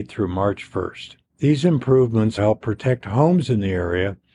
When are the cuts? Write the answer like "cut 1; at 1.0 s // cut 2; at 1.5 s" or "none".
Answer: cut 1; at 1.2 s // cut 2; at 2.4 s